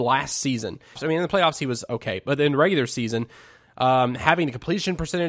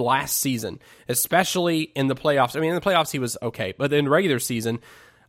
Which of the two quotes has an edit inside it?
first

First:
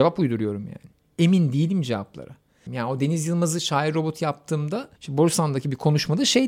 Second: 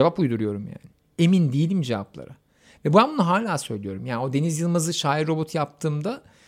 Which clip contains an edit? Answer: first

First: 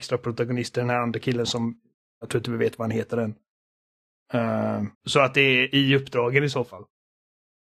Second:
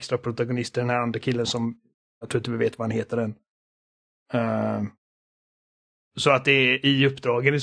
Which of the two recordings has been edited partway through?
first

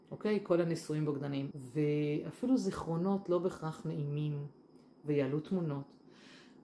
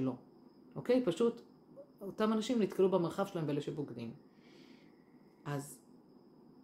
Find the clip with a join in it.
first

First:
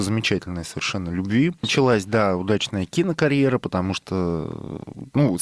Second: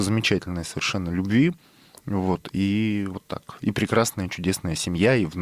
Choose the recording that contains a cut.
first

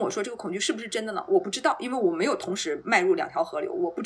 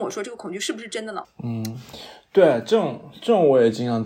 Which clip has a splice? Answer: second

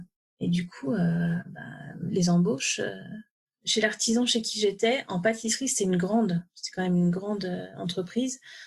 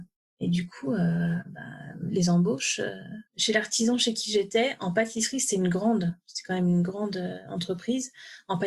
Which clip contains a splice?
second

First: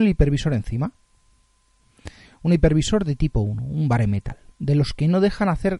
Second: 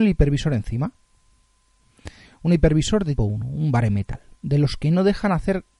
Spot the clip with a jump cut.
second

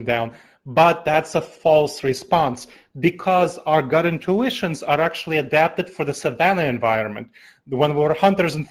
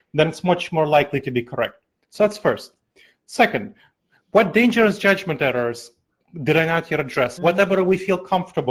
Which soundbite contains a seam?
second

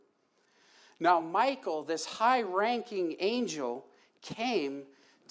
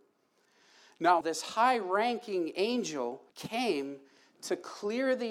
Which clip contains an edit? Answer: second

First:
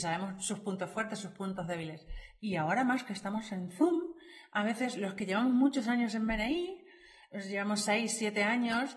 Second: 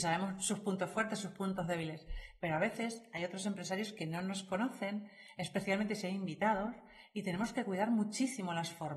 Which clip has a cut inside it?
first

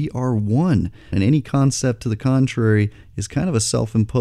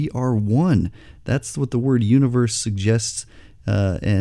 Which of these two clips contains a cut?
first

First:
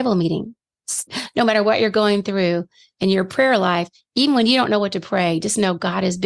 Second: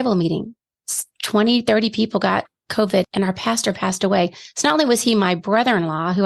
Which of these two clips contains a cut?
first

